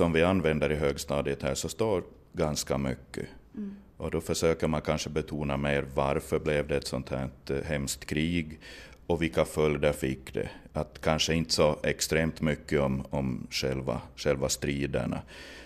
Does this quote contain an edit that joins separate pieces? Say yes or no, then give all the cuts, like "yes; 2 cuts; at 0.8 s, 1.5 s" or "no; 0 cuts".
no; 0 cuts